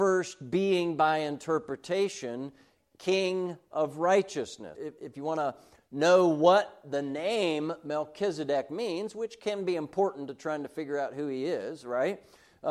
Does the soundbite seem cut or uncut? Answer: cut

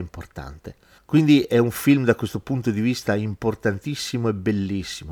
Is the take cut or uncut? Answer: cut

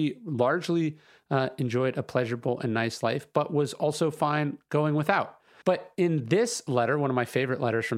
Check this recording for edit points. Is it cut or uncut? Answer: cut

